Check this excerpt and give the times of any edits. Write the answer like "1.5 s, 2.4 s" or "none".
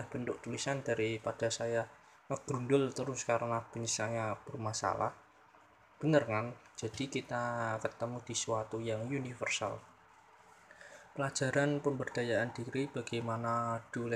6.7 s